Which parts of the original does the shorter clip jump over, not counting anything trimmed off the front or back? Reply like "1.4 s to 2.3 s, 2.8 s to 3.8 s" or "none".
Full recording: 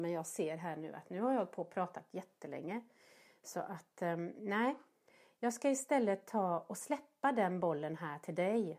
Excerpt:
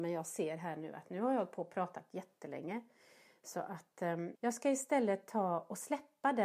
4.3 s to 5.3 s

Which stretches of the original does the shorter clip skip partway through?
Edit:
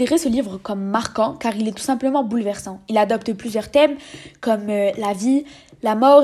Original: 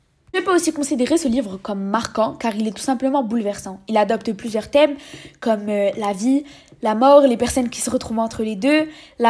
none

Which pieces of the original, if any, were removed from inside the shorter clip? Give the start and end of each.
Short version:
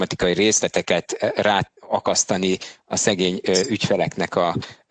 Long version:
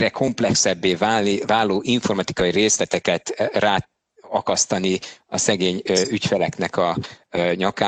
3.9 s to 4.2 s

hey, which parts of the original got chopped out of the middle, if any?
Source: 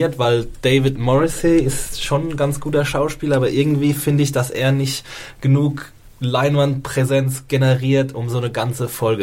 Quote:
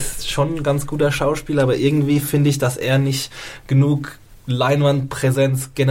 none

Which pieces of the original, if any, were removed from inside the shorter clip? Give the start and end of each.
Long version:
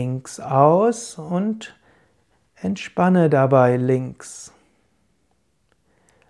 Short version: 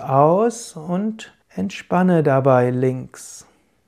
1.8 s to 2.5 s

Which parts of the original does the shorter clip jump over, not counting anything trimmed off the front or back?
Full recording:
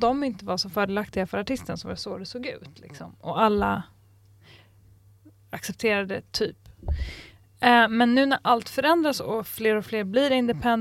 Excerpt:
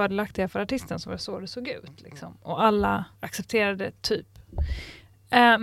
3.9 s to 5.4 s

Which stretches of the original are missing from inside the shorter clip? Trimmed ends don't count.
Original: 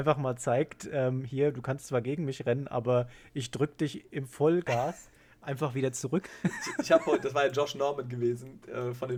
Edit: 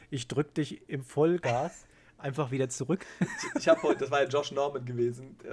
none

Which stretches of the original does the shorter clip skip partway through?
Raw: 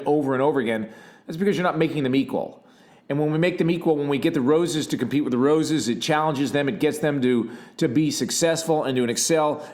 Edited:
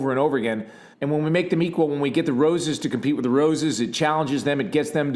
1.2 s to 3.0 s

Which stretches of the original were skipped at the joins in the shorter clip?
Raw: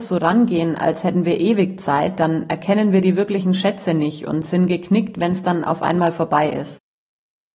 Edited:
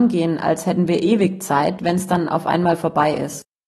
2.2 s to 5.1 s

